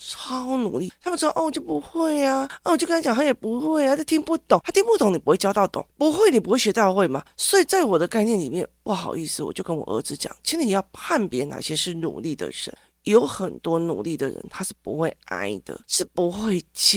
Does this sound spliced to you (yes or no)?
no